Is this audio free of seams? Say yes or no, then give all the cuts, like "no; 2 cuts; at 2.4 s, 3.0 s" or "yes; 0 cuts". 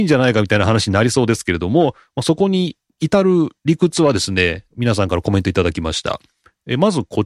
yes; 0 cuts